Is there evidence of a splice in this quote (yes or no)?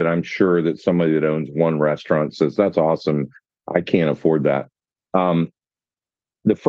no